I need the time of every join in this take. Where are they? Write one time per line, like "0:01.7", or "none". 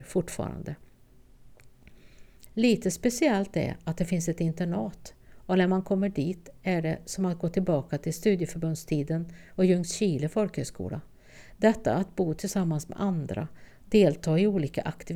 0:02.5